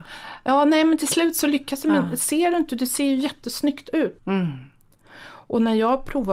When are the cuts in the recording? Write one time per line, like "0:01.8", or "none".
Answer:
0:04.2